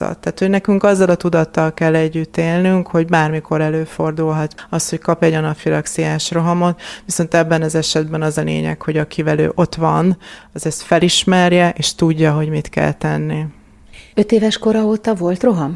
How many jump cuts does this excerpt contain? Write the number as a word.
zero